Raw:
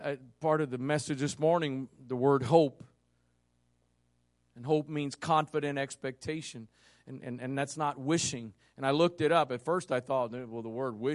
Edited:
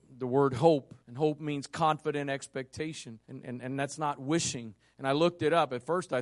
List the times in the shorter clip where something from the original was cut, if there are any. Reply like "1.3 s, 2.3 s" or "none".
1.0 s, 3.2 s